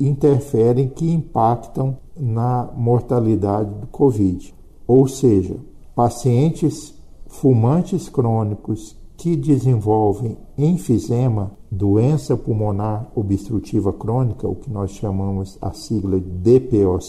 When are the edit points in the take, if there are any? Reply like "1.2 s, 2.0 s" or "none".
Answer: none